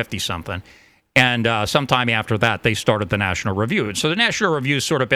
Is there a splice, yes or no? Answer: no